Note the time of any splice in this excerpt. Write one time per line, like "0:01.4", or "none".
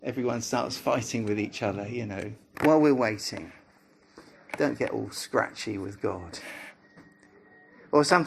0:02.5